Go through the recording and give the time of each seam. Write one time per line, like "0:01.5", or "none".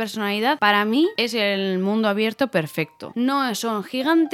0:03.1